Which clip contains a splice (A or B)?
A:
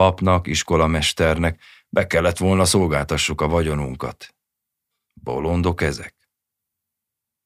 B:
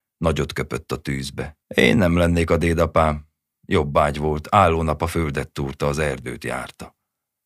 B